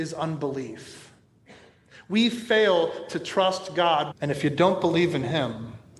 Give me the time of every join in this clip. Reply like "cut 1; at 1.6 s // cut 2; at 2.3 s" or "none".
cut 1; at 4.1 s